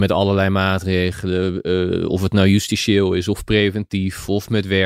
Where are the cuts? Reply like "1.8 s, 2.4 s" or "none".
none

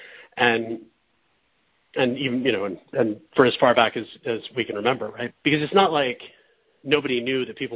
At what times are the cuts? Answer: 5.3 s

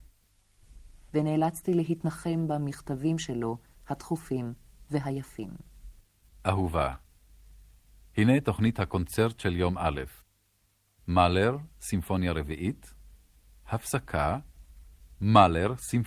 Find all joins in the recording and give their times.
1.1 s

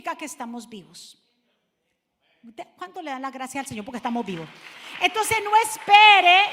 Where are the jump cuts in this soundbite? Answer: none

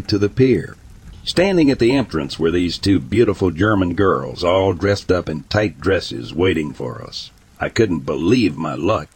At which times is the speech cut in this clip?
none

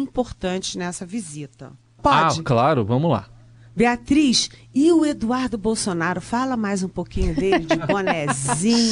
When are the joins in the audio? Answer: 2.0 s

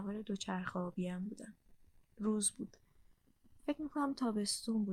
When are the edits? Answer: none

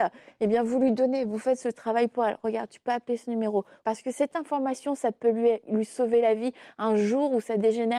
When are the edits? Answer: 3.8 s

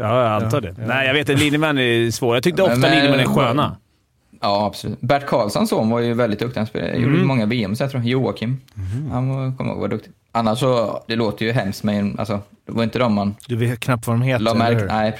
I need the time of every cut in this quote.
11.1 s, 13.4 s

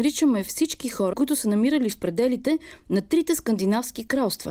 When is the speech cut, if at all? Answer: 1.1 s

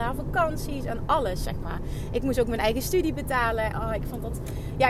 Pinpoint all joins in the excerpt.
3.7 s

